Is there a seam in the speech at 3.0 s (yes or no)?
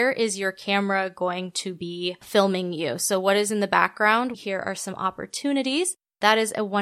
no